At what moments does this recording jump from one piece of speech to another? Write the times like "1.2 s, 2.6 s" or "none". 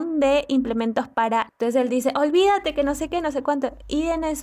1.5 s